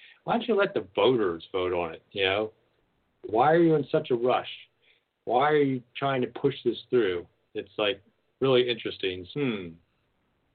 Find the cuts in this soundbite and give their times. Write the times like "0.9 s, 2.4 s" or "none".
3.3 s, 9.3 s